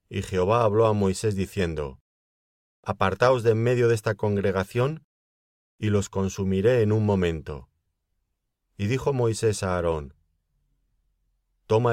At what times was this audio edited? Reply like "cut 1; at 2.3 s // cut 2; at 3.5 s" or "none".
cut 1; at 8.6 s